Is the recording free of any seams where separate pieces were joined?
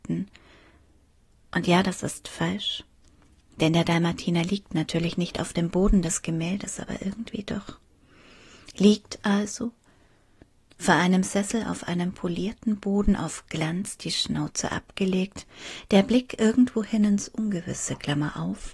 yes; 0 cuts

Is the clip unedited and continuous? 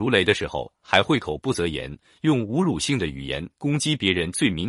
yes; 0 cuts

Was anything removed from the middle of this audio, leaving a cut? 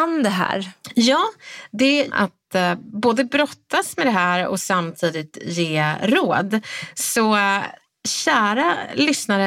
yes; 1 cut; at 2.1 s

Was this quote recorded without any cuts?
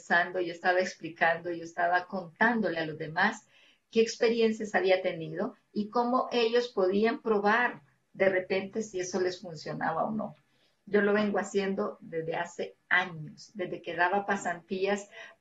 yes; 0 cuts

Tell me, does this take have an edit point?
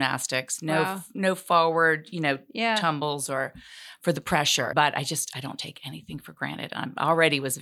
yes; 1 cut; at 4.7 s

